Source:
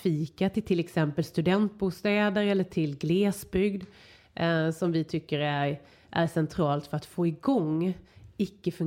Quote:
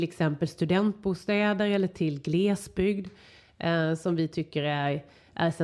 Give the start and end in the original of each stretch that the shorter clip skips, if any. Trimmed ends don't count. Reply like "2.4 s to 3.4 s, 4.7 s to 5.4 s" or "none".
none